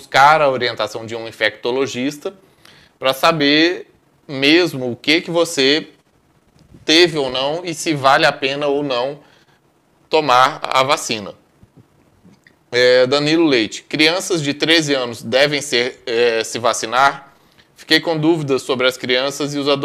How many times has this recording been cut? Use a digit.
0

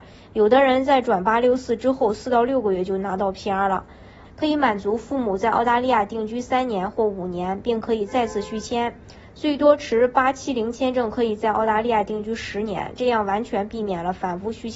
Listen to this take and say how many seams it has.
1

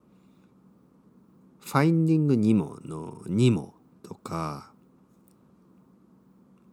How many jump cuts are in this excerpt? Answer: 0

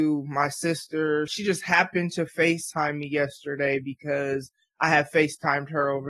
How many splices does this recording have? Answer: 1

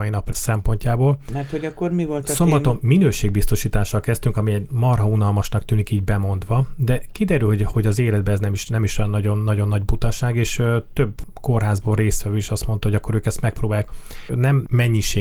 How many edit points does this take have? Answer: 1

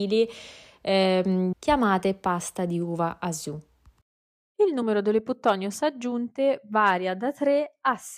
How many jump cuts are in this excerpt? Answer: 1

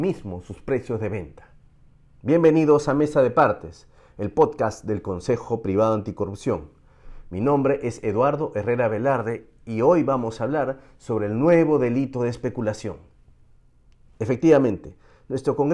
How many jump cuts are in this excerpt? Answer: 0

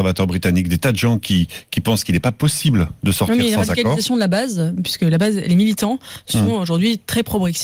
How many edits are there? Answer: 0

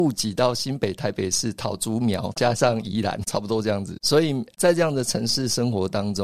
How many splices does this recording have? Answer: 0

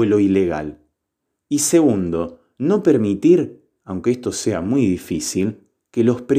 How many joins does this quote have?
0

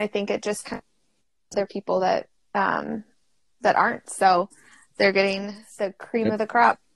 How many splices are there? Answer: 0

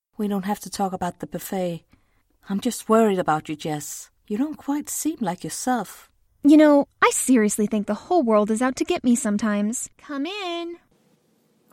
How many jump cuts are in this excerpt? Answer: 3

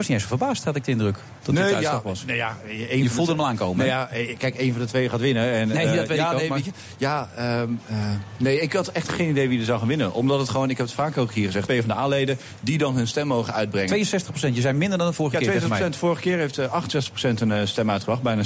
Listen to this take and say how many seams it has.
1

